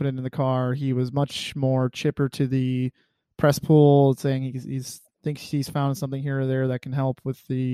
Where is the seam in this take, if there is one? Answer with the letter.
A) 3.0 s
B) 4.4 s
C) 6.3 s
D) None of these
D